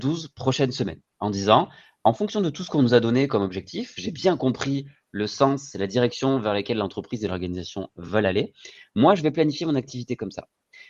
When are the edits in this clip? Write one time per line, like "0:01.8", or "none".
none